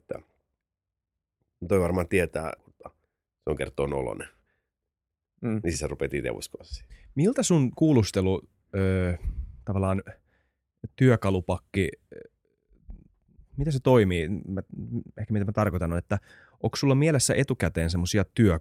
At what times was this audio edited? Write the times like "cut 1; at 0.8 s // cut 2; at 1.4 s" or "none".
cut 1; at 2.6 s

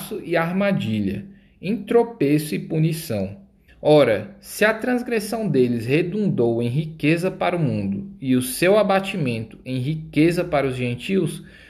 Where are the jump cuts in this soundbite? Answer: cut 1; at 3.7 s

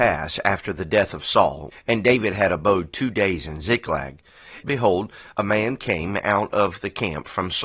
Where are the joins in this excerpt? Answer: cut 1; at 1.7 s // cut 2; at 4.6 s

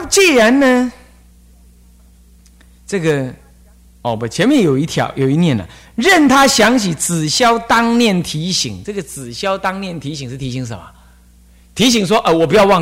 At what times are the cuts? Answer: none

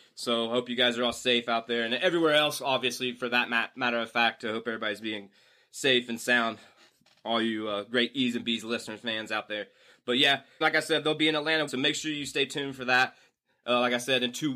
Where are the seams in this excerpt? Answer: cut 1; at 10.6 s // cut 2; at 11.7 s

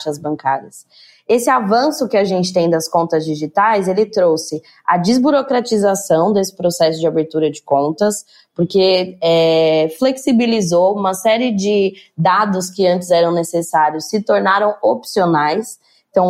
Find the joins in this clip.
none

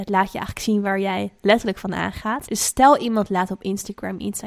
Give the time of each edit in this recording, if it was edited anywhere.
cut 1; at 2.5 s

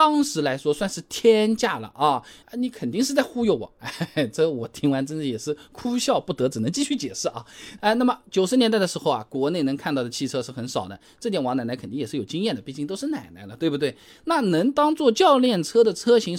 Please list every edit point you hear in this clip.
cut 1; at 2.4 s // cut 2; at 7.8 s

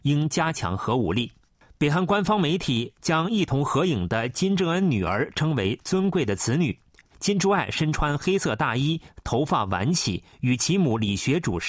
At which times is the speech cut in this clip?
cut 1; at 7.1 s

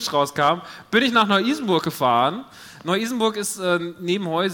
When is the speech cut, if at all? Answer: none

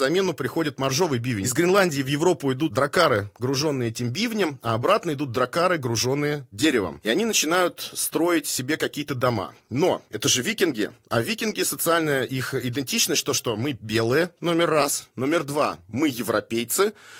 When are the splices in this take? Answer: none

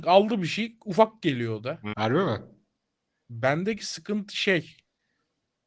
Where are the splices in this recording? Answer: cut 1; at 1.9 s

